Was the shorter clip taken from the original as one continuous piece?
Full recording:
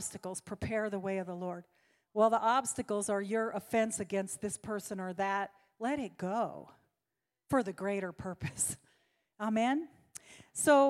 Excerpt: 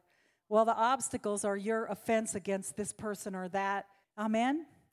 no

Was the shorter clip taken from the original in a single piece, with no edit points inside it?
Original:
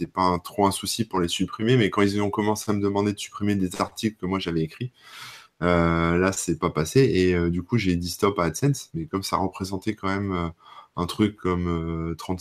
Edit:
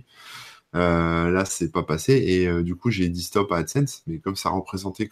yes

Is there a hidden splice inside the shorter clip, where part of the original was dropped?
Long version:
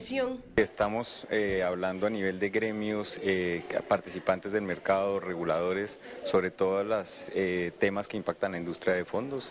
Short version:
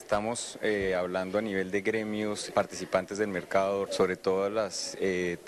yes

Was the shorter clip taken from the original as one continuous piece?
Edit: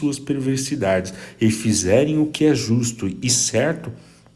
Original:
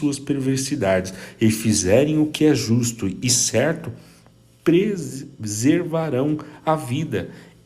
yes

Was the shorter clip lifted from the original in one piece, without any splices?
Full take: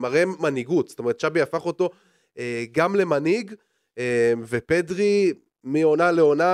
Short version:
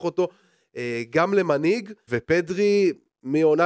no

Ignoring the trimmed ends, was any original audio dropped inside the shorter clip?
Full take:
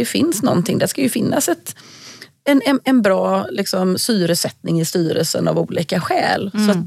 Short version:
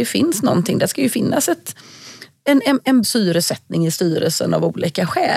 yes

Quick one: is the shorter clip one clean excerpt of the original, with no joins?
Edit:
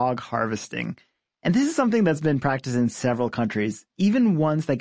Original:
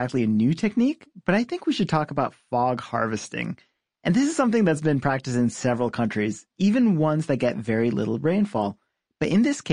yes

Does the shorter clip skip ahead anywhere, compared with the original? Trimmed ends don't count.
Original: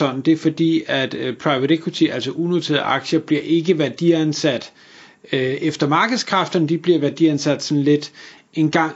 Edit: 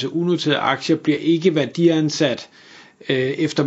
no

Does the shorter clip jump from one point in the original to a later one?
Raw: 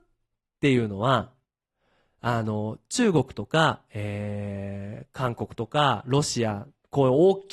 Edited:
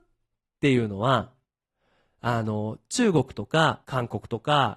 yes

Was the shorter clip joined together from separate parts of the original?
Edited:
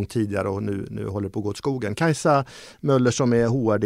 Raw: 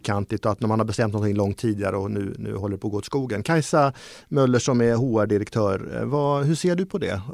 no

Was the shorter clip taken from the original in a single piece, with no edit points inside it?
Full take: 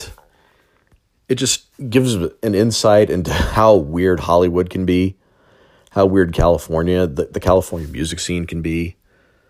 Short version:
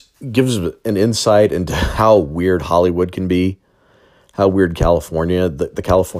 yes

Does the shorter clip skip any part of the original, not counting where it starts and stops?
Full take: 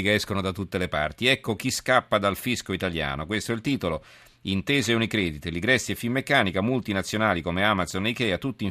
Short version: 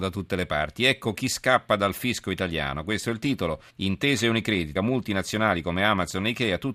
yes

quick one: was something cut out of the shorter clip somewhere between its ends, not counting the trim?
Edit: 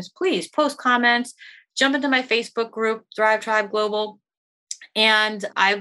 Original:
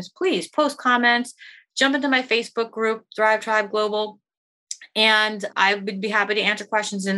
no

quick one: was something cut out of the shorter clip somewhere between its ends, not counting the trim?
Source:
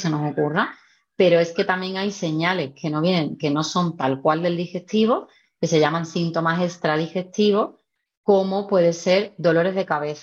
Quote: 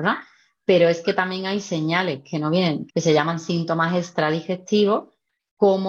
yes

